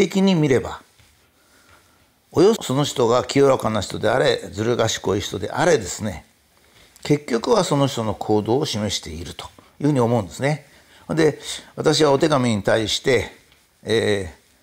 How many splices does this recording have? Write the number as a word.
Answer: one